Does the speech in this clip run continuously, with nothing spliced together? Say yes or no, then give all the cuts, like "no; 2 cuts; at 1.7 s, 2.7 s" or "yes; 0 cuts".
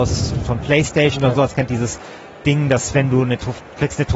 yes; 0 cuts